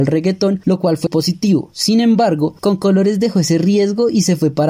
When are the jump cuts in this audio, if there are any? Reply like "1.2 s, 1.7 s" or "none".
1.1 s